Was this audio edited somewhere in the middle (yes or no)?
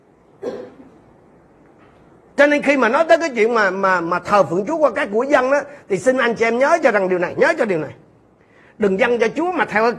no